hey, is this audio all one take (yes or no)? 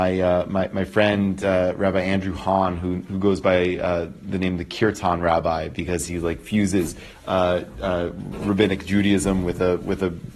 yes